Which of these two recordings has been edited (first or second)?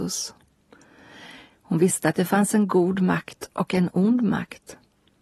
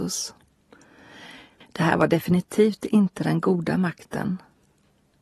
second